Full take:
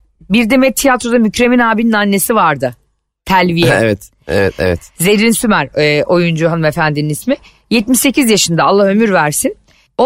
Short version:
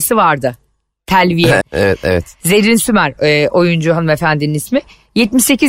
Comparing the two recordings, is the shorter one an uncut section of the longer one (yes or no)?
no